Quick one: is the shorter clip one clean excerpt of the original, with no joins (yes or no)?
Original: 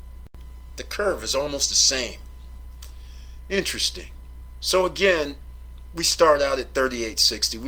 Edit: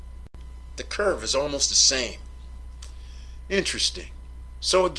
yes